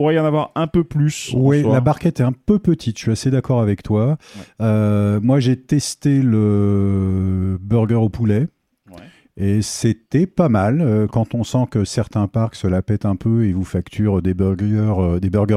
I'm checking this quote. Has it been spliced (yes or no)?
no